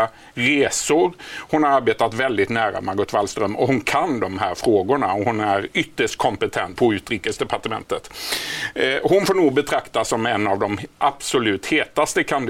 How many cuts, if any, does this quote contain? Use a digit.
1